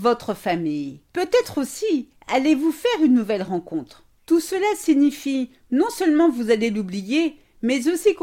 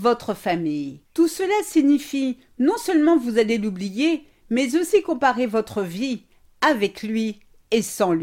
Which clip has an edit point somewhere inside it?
second; 1 cut; at 1.0 s

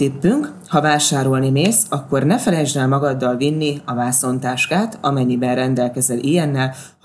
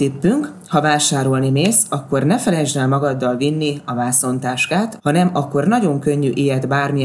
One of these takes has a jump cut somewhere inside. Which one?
second; 1 cut; at 5.0 s

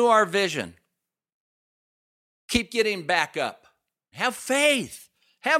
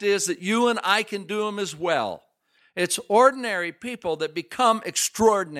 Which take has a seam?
first; 1 cut; at 4.1 s

